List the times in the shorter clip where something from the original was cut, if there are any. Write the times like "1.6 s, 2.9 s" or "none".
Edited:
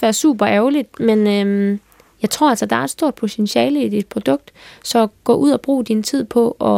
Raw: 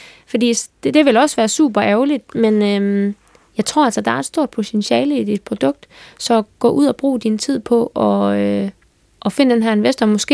none